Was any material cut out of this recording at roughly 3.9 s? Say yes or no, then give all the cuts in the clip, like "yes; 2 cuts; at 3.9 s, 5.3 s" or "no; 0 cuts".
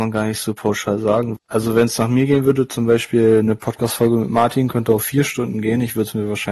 no; 1 cut; at 1.4 s